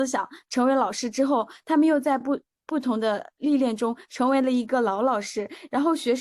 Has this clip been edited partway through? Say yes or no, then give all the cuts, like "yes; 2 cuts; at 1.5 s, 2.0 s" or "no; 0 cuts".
no; 0 cuts